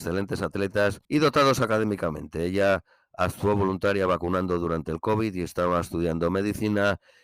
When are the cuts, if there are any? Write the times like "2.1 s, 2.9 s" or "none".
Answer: 1.0 s